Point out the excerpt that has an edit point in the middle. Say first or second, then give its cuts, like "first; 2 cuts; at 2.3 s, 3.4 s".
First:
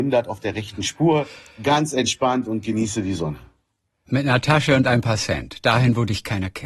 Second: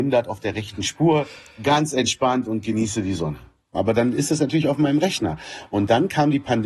second; 1 cut; at 3.7 s